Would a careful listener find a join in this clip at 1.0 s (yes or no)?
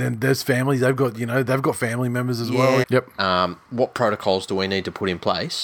no